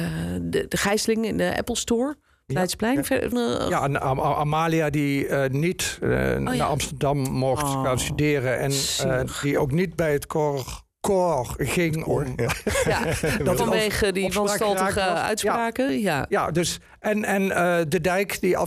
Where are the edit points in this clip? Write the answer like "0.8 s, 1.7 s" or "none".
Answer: 3.3 s